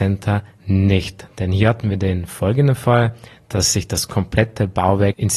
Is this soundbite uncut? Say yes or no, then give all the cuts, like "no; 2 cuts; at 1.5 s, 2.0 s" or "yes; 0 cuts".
yes; 0 cuts